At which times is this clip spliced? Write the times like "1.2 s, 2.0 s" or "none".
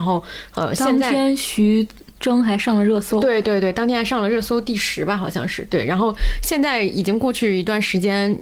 none